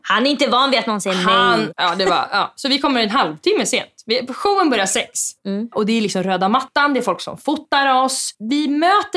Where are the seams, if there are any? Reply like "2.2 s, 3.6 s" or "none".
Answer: 1.7 s, 5.4 s